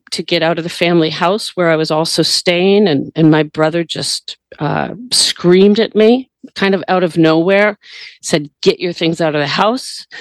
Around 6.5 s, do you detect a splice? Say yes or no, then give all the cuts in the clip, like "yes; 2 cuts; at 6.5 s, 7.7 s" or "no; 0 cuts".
yes; 1 cut; at 6.5 s